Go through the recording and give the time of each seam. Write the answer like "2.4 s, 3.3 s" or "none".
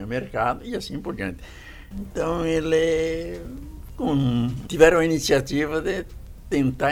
1.9 s, 4.7 s

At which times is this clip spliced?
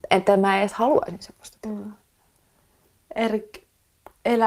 none

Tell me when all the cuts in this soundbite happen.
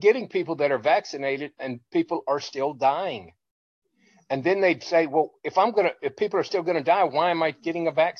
none

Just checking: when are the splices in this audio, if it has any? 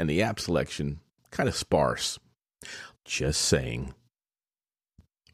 2.9 s

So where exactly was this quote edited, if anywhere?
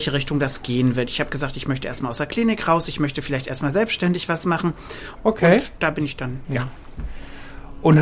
5.2 s

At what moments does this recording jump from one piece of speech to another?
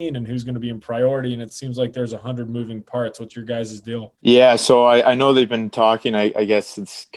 4.2 s

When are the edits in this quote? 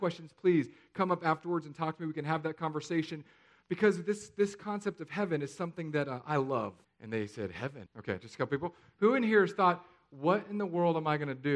6.8 s, 7.9 s

